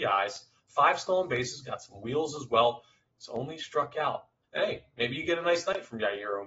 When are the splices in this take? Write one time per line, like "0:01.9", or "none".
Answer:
0:04.4